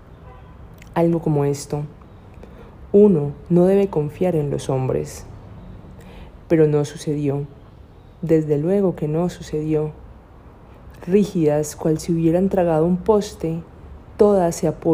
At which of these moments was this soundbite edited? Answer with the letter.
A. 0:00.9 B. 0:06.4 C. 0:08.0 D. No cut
B